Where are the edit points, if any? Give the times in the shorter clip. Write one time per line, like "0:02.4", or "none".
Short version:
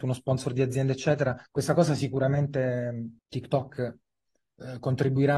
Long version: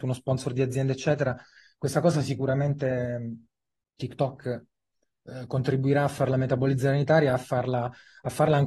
0:01.5
0:03.2